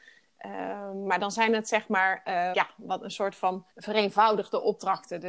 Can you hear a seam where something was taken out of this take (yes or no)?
yes